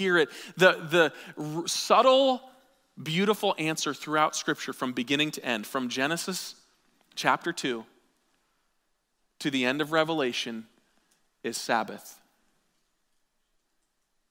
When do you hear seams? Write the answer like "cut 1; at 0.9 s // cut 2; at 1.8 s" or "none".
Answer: none

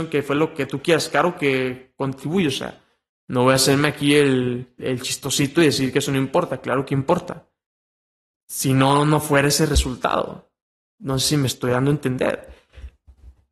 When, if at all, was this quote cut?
cut 1; at 4.8 s // cut 2; at 8.3 s

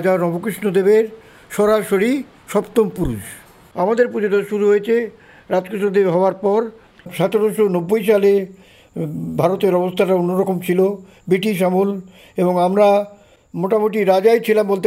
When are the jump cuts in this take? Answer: none

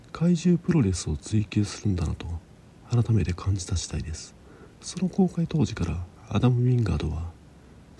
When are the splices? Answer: cut 1; at 4.7 s // cut 2; at 6.2 s

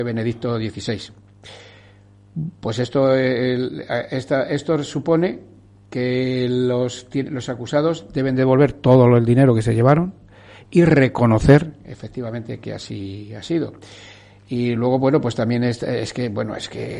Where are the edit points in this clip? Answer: none

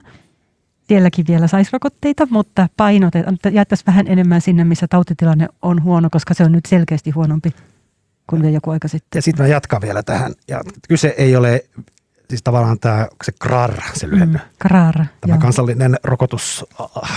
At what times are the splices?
none

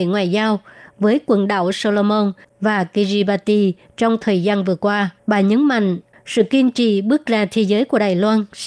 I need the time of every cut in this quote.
cut 1; at 5.2 s

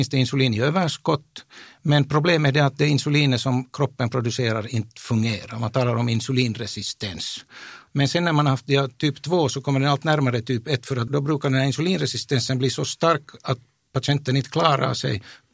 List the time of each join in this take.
cut 1; at 7.9 s // cut 2; at 11.1 s

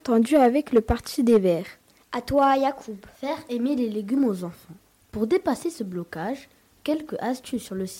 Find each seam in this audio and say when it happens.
cut 1; at 2.0 s // cut 2; at 5.0 s

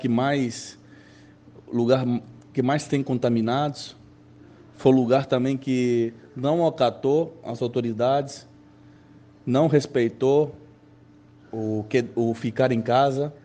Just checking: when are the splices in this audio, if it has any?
none

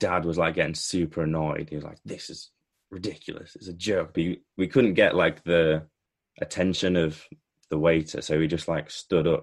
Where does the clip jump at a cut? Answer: cut 1; at 4.1 s

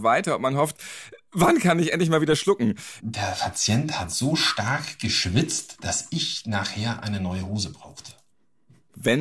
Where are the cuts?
cut 1; at 3.0 s

